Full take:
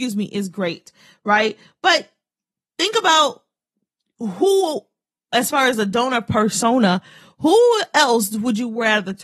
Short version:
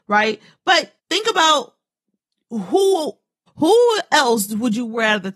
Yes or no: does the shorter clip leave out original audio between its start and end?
yes